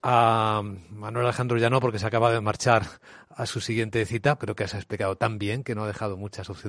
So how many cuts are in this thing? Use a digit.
1